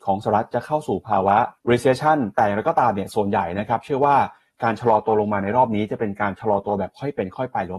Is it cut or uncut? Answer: cut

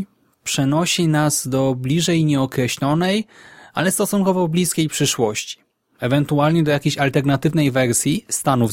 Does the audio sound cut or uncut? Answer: uncut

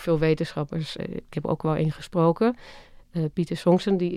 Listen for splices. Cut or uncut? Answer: cut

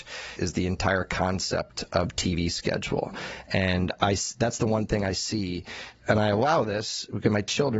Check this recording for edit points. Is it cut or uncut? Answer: uncut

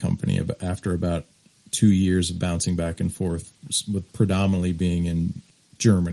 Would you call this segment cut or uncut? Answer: uncut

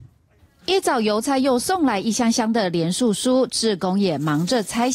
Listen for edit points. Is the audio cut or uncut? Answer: uncut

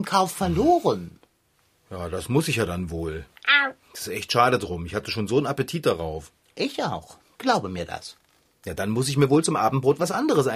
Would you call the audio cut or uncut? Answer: uncut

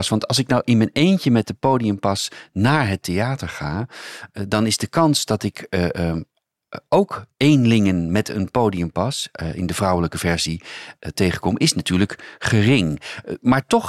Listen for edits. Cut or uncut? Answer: uncut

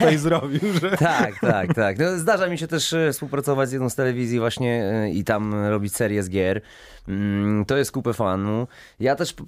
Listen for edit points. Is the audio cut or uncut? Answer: cut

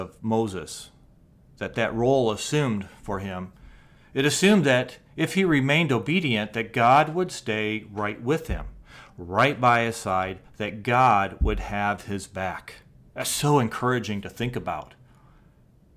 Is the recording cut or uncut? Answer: uncut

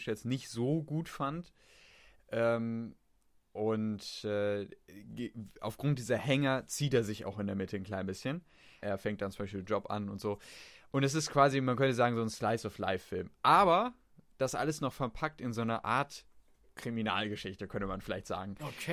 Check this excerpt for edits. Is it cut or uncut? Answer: cut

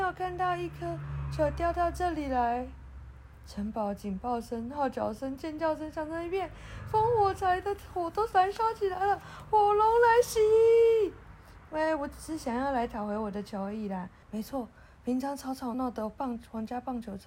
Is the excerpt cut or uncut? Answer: cut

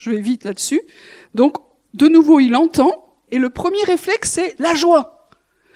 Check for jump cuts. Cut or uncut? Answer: uncut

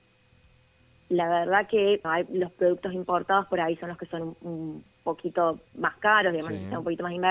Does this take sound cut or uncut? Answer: cut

